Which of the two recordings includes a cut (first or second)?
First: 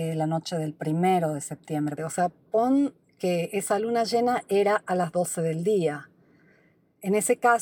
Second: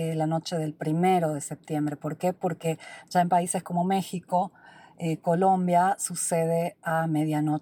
first